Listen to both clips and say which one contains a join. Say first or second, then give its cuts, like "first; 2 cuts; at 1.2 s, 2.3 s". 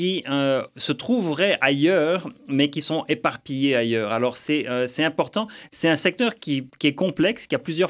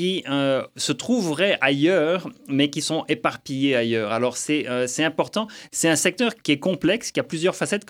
second; 1 cut; at 6.4 s